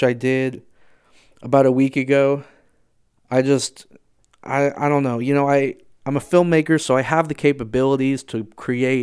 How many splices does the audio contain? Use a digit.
1